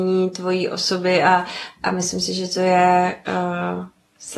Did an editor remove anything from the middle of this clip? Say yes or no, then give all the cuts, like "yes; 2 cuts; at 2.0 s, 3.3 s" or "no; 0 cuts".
no; 0 cuts